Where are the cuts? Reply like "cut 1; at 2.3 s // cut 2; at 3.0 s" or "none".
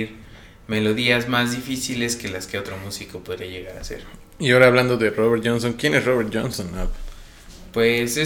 none